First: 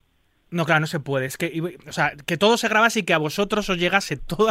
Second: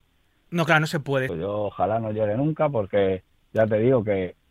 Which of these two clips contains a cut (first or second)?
second